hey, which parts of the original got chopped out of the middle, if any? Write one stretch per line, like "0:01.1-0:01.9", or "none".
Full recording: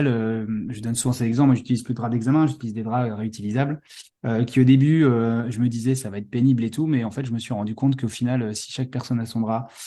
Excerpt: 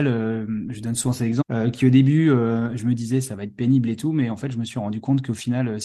0:01.4-0:04.1

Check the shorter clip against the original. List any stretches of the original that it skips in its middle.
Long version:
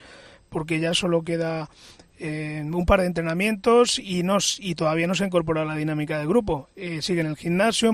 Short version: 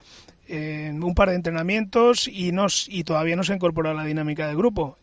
none

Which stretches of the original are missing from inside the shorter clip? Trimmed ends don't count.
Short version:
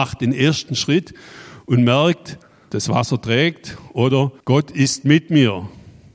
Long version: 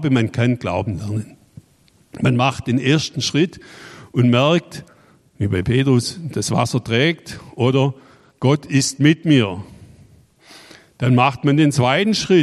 0:05.2-0:06.3
0:08.0-0:08.3

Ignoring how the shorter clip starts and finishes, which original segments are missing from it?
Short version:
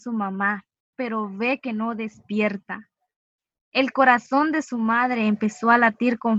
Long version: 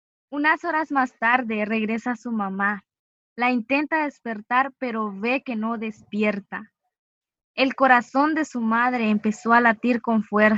0:03.1-0:04.8

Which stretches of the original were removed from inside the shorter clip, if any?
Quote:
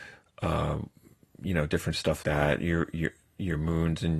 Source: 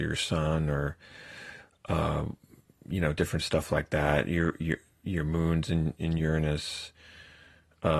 0:03.7-0:03.9

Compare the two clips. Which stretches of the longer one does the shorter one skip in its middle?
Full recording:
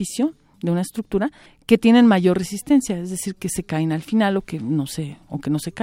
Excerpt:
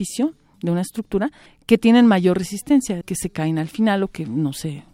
0:03.0-0:03.3

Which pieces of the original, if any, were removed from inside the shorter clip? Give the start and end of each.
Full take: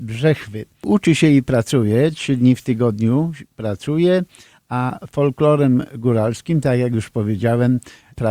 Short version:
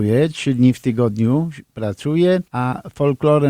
0:04.3-0:04.6

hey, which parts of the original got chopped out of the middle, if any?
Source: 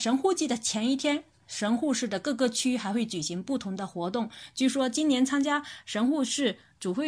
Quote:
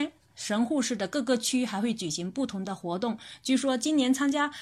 none

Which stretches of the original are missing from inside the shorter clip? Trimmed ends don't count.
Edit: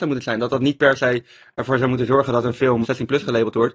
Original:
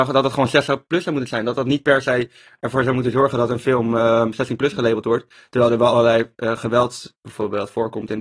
0:03.9-0:04.3

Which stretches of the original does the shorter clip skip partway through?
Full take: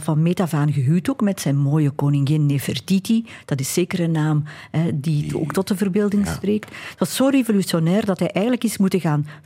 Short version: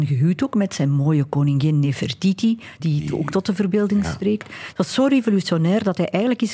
0:03.5-0:05.0

